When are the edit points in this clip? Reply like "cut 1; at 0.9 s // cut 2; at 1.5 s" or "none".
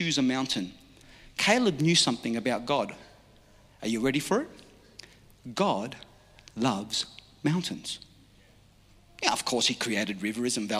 none